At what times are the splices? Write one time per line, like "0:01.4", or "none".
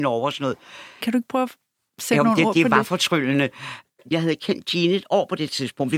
0:01.0
0:04.1